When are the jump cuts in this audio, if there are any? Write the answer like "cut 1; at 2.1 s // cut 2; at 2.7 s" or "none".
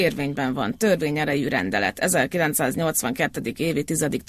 none